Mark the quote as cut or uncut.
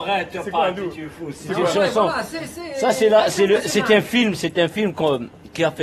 uncut